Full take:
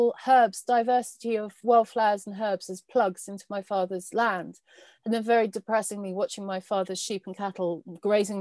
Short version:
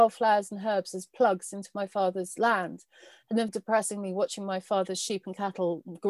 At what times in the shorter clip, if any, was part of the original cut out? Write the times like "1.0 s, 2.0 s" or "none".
3.5 s